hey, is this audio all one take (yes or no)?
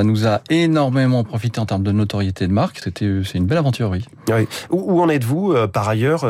no